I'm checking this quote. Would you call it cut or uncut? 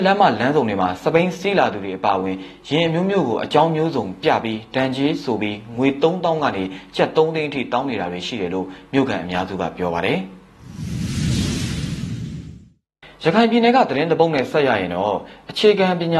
uncut